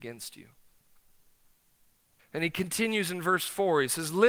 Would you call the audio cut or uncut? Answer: cut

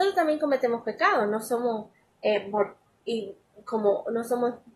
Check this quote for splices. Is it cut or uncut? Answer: uncut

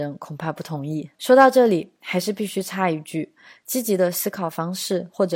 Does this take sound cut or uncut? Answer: cut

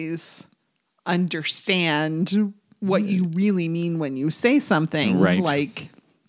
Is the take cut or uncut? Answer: uncut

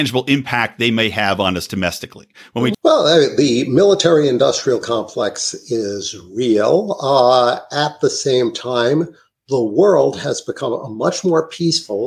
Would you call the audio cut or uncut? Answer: cut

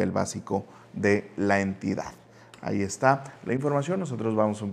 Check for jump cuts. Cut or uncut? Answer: uncut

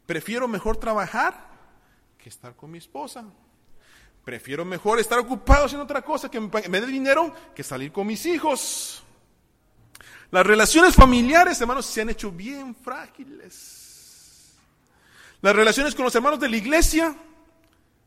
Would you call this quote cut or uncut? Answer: uncut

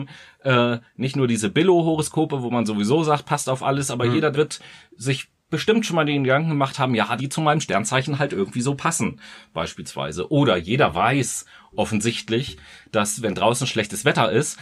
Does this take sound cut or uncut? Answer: cut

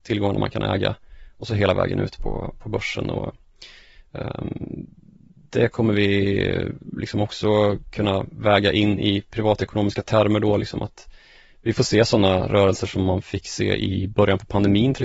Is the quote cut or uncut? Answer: uncut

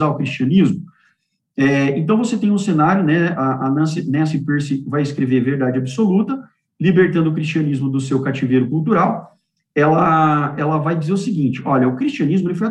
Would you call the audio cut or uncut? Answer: uncut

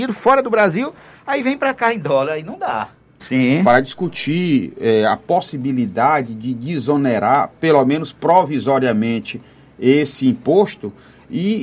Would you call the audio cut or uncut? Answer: cut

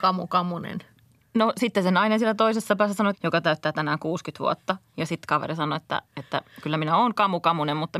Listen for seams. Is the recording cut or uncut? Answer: cut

